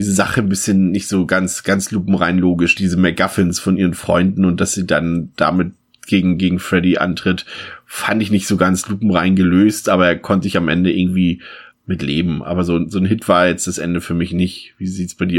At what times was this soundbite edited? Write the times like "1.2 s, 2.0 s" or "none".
2.8 s, 11.7 s